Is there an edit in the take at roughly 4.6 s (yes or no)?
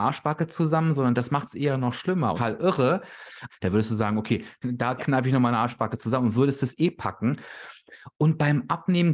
yes